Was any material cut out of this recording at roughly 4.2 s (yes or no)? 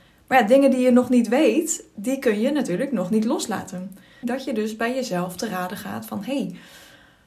yes